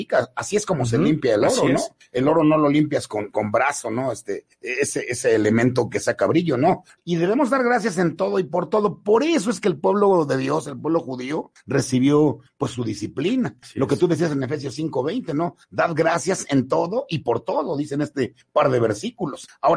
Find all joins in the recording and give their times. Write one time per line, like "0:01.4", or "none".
0:07.0